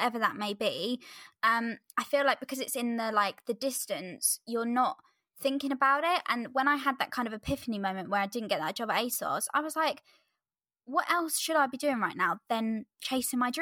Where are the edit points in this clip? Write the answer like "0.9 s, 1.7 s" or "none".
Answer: none